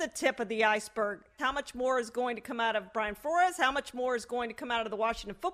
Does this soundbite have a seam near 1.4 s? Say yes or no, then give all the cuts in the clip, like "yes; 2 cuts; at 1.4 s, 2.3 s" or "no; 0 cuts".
yes; 1 cut; at 1.4 s